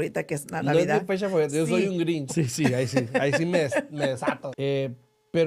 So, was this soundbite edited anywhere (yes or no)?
yes